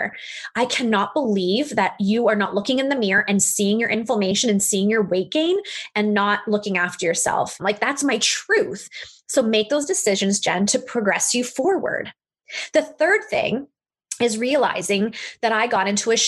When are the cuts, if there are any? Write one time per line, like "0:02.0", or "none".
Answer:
0:07.6